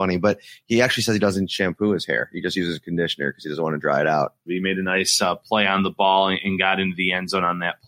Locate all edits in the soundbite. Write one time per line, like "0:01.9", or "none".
0:04.5